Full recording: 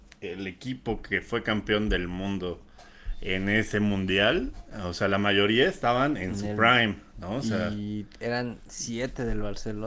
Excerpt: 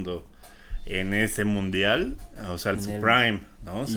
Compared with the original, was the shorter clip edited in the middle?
yes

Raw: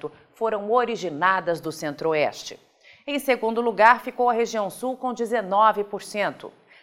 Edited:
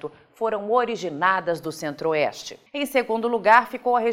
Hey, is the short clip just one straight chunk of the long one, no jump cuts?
no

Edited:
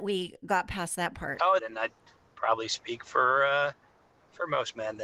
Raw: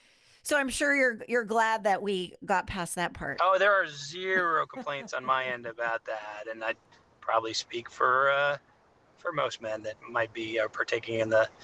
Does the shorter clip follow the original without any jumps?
no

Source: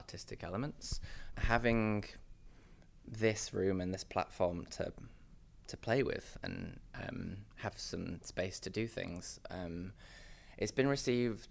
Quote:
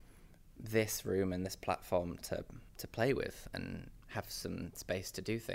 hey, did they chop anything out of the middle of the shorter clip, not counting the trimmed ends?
yes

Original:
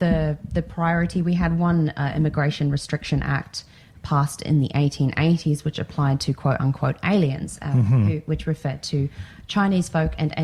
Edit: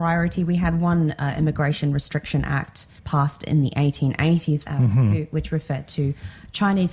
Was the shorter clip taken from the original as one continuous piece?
no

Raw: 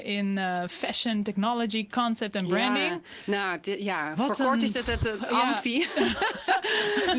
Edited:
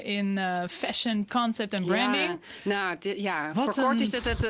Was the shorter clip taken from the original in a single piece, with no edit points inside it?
no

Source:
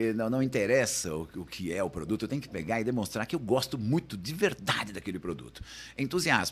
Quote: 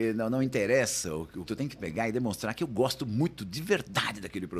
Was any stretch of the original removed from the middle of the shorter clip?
yes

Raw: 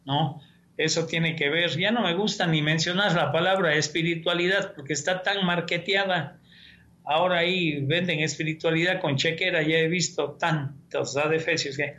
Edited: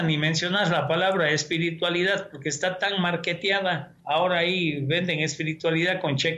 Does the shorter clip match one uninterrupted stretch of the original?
no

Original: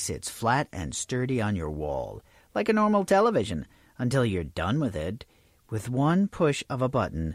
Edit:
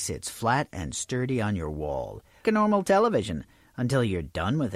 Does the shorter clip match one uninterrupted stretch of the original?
no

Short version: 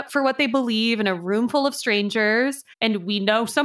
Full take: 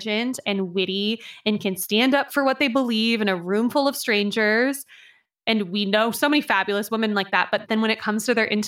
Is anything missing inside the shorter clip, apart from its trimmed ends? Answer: yes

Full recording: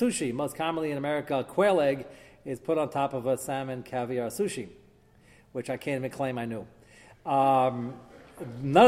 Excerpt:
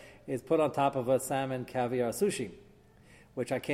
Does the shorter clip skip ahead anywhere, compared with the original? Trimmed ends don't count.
no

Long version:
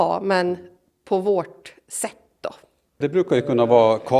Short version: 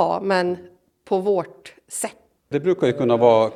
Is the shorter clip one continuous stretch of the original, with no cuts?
no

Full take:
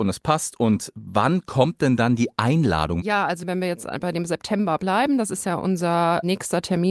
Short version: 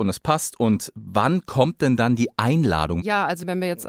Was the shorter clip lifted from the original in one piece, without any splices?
yes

